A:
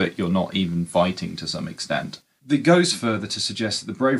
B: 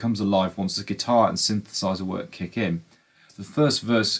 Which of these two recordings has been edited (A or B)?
B